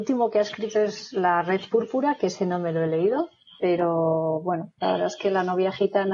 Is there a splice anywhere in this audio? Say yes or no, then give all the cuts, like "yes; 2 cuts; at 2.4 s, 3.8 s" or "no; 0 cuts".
no; 0 cuts